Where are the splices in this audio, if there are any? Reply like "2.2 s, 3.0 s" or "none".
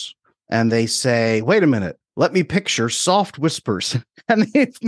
2.1 s